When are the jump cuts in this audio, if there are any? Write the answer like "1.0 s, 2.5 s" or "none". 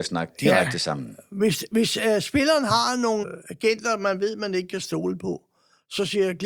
3.2 s